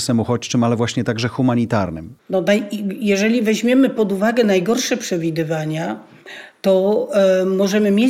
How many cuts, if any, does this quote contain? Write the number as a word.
one